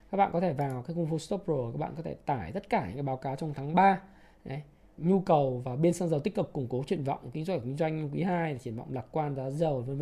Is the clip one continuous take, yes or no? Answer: no